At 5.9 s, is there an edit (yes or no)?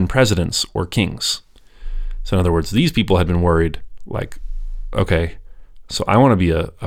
no